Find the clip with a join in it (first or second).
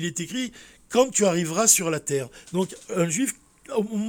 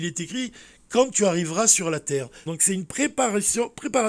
second